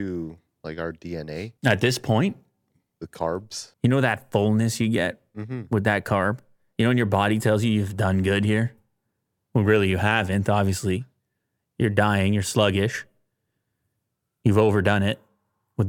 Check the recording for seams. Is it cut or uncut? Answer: cut